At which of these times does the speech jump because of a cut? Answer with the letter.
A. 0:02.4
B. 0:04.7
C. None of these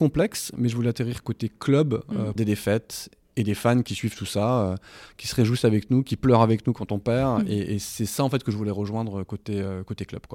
A